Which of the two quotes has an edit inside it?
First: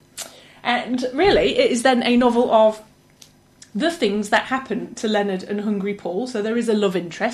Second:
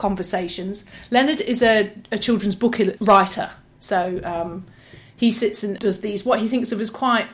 second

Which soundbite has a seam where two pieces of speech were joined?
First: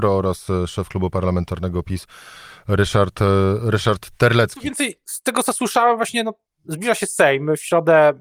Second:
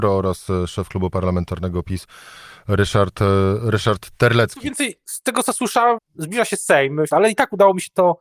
second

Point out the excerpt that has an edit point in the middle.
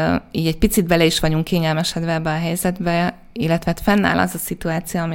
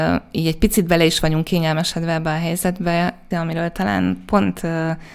second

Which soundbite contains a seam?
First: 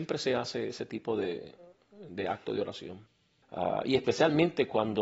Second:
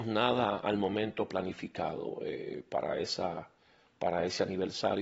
first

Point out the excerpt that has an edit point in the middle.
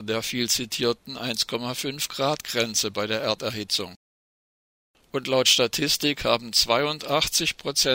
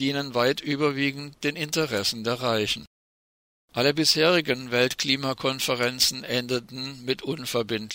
second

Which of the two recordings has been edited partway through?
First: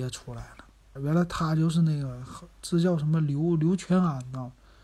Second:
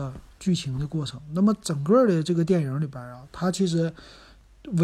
first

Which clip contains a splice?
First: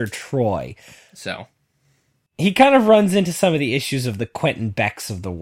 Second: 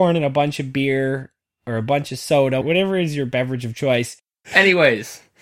second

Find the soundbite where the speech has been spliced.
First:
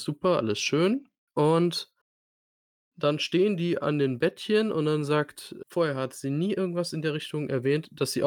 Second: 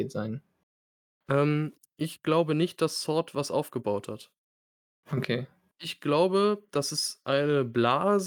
first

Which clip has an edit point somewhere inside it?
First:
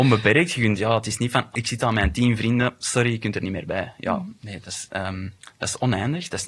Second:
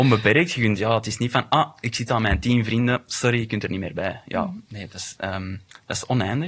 first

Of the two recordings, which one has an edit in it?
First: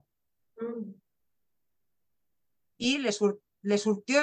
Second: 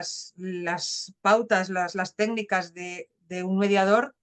first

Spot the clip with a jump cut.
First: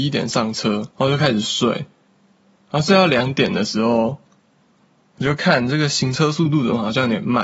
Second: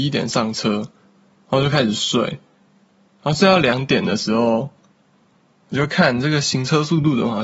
first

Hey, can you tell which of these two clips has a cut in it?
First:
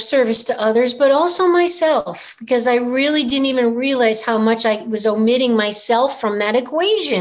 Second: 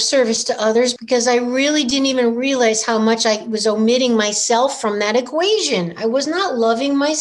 second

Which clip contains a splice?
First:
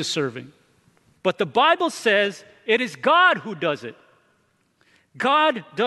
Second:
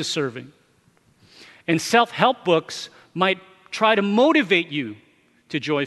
first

